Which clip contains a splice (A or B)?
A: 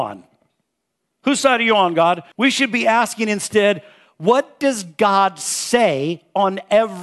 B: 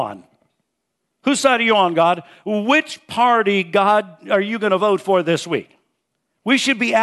A